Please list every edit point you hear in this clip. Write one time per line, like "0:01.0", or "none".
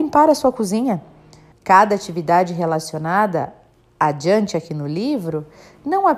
0:01.5